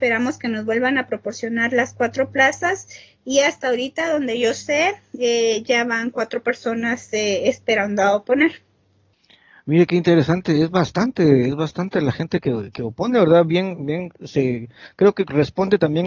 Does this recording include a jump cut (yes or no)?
no